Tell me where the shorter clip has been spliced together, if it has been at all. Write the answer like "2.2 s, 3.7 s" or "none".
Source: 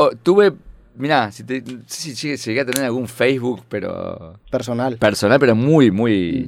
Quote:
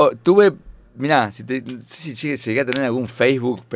none

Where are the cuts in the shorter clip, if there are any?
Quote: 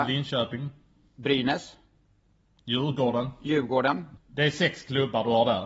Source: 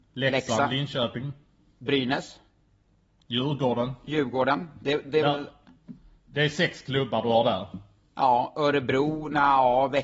4.2 s

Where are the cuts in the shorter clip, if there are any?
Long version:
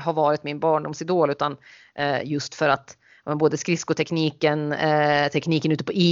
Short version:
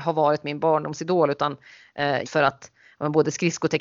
2.2 s

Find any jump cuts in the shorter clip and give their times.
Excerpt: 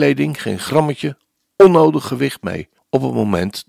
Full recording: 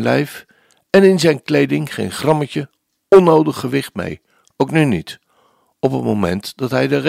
2.8 s

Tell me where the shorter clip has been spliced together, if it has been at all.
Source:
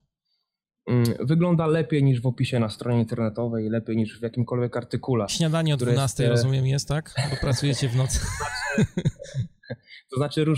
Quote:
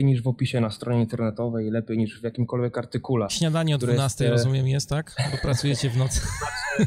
none

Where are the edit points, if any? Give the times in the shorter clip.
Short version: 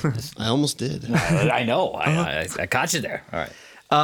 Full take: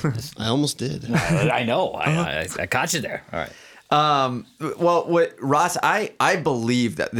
none

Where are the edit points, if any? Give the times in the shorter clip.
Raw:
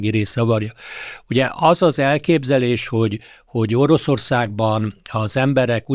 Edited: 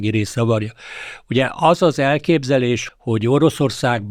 2.9 s

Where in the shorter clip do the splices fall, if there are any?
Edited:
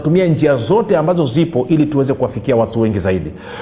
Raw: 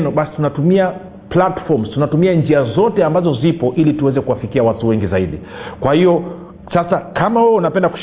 none

